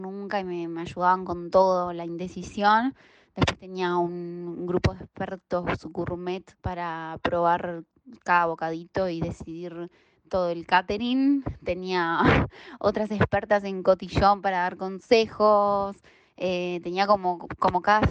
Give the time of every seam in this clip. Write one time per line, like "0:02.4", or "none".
0:06.5